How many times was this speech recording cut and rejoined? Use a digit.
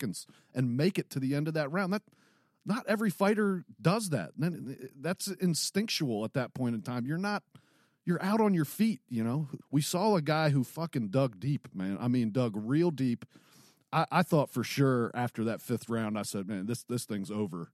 1